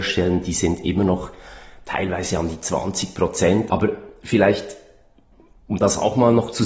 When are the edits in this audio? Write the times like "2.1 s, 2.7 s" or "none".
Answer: 3.7 s